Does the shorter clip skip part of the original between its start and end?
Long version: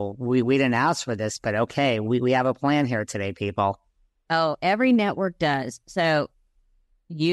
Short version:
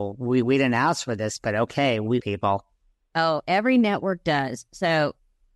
yes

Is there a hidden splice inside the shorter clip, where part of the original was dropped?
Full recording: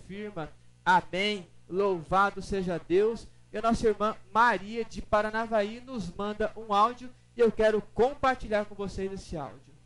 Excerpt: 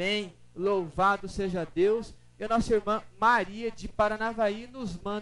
no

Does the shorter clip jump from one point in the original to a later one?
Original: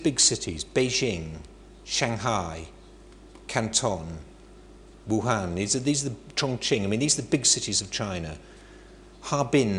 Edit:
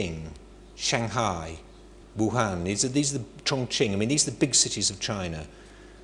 yes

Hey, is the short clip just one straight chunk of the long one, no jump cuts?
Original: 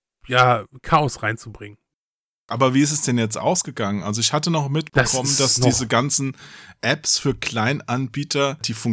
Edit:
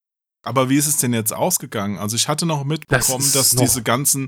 yes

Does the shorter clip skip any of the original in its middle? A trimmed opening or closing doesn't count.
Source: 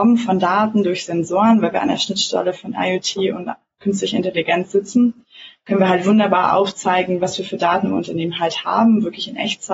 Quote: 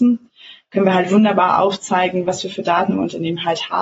no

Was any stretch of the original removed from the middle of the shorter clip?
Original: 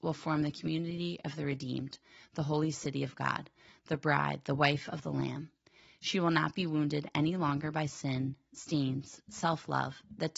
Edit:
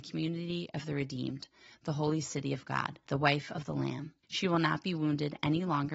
yes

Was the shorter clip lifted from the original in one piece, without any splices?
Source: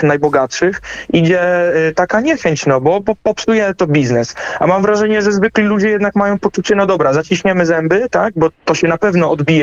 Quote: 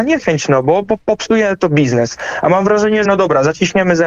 no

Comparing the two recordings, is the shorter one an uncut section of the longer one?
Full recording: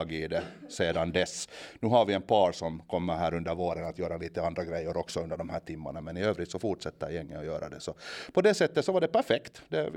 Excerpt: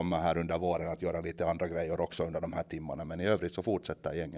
yes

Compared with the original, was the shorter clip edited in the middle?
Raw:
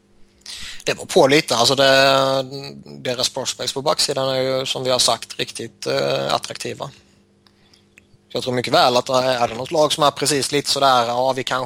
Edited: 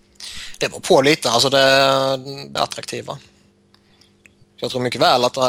yes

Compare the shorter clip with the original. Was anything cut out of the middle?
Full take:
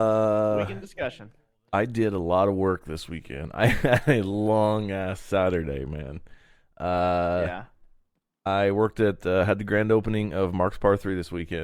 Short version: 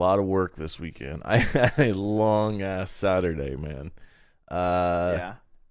no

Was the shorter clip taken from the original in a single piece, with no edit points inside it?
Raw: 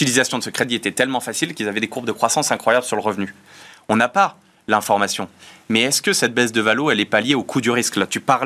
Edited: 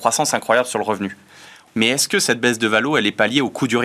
no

